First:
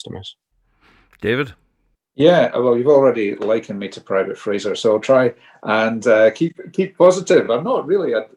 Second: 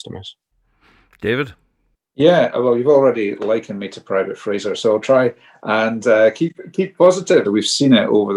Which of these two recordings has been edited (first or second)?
second